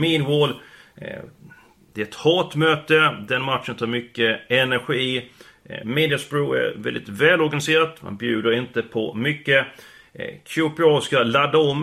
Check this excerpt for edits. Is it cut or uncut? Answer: uncut